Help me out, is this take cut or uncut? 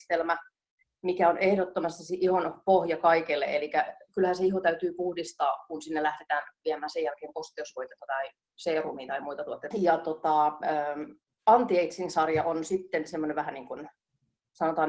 cut